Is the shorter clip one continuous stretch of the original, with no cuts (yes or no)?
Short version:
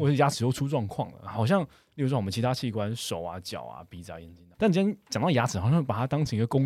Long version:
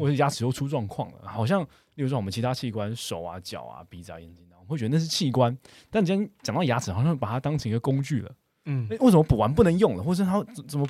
no